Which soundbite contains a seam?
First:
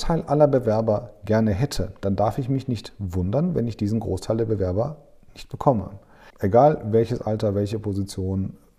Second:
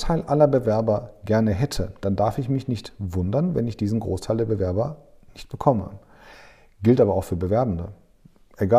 first; 1 cut; at 6.3 s

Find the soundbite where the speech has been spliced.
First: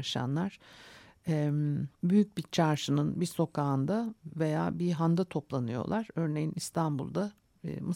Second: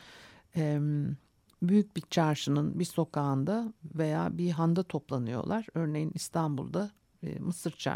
first; 1 cut; at 1.9 s

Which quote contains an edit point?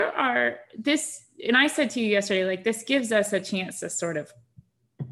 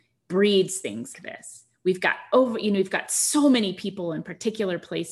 second; 1 cut; at 1.1 s

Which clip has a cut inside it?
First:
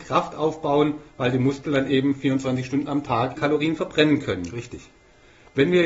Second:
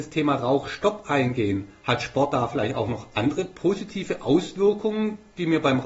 first; 1 cut; at 3.3 s

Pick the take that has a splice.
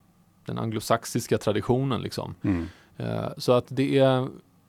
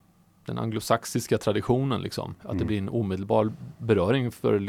second; 1 cut; at 2.4 s

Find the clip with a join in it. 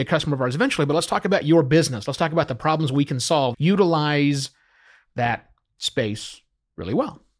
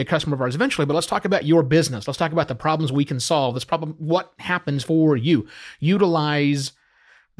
first; 1 cut; at 3.5 s

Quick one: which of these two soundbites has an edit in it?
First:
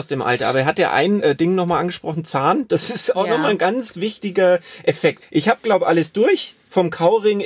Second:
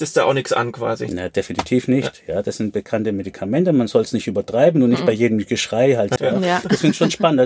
second; 1 cut; at 6.2 s

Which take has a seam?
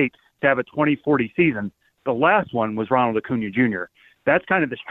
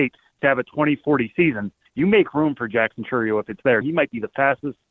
second; 2 cuts; at 1.9 s, 3.8 s

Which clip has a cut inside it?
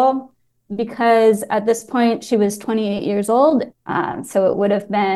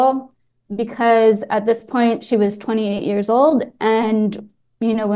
first; 1 cut; at 3.7 s

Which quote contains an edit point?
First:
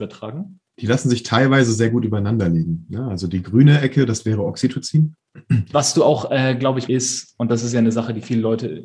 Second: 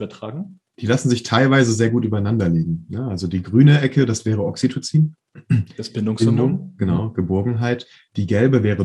first; 2 cuts; at 5.7 s, 6.9 s

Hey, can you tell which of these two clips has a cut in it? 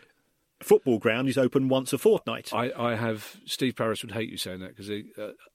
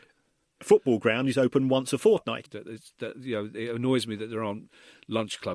second; 1 cut; at 2.5 s

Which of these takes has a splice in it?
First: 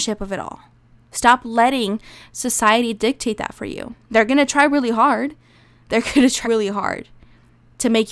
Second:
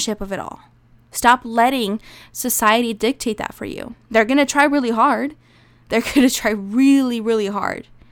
first; 1 cut; at 6.4 s

